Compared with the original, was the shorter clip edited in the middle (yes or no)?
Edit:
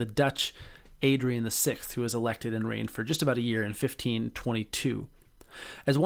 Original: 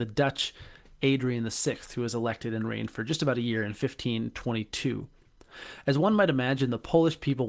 no